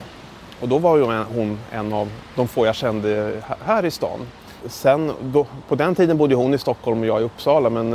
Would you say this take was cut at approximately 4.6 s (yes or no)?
yes